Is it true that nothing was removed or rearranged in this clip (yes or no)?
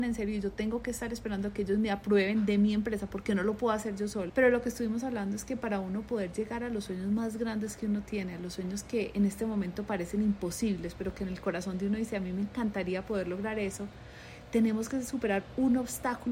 no